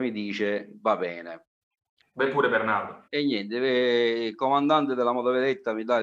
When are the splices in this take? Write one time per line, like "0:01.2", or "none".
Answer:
0:02.0
0:03.1